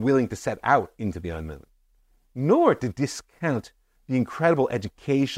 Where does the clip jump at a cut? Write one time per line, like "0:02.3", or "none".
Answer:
none